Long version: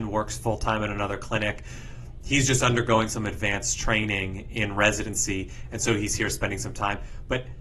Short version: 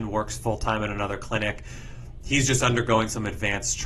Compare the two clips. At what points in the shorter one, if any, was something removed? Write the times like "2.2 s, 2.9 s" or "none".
none